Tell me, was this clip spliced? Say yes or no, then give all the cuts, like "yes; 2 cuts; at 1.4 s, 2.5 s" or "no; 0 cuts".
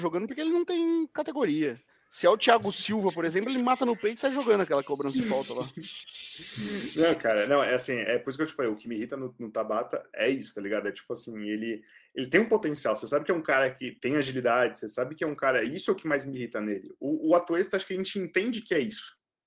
no; 0 cuts